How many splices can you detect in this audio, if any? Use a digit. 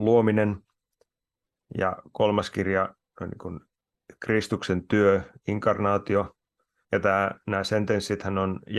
1